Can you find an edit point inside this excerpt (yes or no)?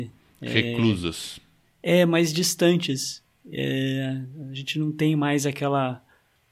no